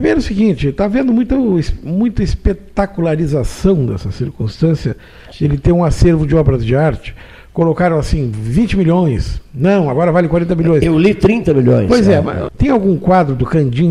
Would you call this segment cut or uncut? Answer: cut